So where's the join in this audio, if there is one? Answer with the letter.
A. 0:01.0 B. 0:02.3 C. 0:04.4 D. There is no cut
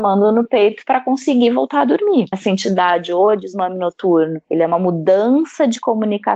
B